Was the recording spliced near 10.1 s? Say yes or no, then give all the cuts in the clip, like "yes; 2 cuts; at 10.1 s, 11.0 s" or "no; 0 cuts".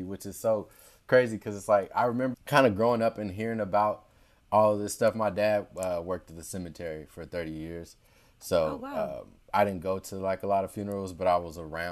no; 1 cut; at 2.3 s